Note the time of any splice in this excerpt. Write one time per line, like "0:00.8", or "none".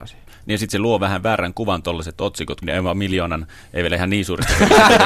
0:02.6